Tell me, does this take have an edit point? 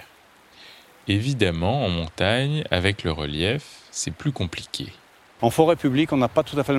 yes; 1 cut; at 5.4 s

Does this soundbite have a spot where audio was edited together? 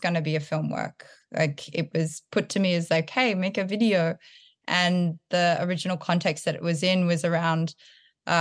no; 0 cuts

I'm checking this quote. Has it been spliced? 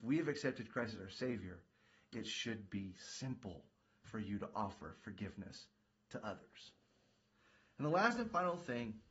no; 0 cuts

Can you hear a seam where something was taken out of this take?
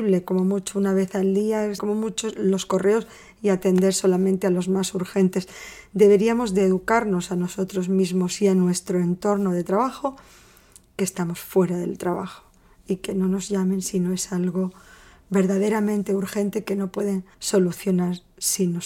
yes; 2 cuts; at 1.8 s, 17.3 s

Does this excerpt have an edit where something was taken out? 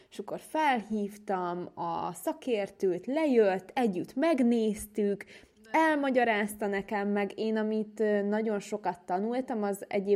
no; 0 cuts

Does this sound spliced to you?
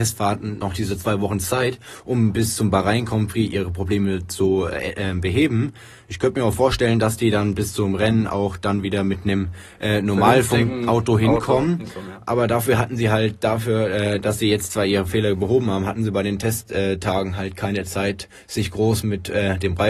no; 0 cuts

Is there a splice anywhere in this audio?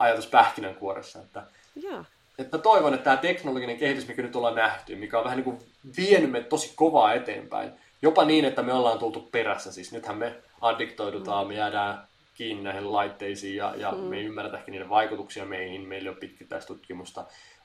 no; 0 cuts

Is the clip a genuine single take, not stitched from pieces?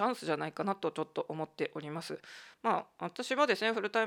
yes; 0 cuts

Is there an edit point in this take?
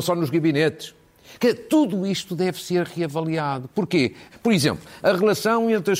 yes; 1 cut; at 4.3 s

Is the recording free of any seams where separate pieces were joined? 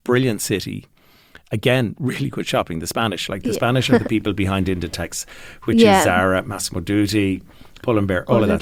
yes; 0 cuts

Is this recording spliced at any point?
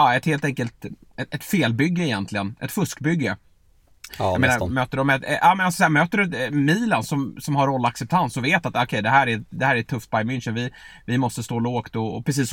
yes; 1 cut; at 4.1 s

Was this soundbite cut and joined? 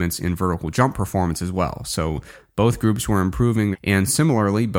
yes; 1 cut; at 3.7 s

